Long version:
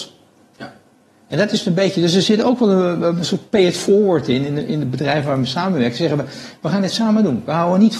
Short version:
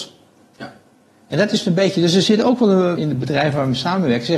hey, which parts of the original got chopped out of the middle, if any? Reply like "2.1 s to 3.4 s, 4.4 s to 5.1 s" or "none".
3.0 s to 4.7 s